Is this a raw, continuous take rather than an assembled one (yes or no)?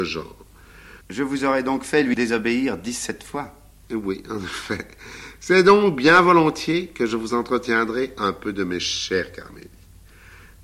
no